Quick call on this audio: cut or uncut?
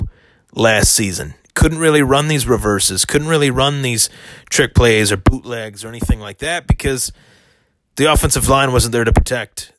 uncut